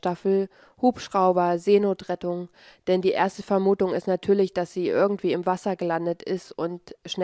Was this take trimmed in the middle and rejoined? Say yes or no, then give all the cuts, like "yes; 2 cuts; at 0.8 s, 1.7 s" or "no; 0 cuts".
no; 0 cuts